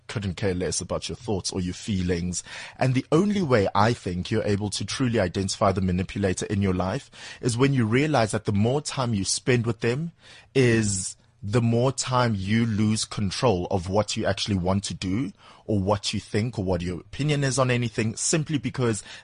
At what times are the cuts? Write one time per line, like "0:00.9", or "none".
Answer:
none